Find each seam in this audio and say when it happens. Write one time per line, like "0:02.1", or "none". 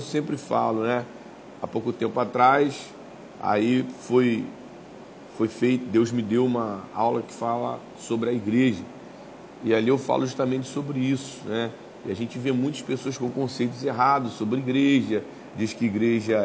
0:15.5